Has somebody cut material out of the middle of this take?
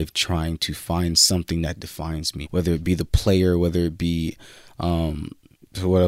yes; 1 cut; at 2.4 s

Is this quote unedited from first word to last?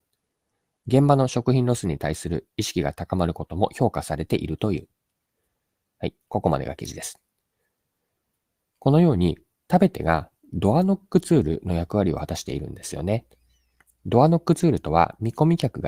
yes; 0 cuts

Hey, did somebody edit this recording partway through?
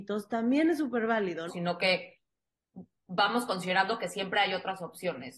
yes; 1 cut; at 1.5 s

